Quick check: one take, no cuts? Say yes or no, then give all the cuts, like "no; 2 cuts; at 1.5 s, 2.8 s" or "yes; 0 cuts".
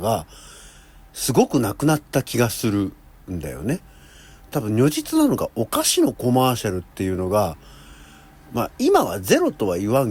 yes; 0 cuts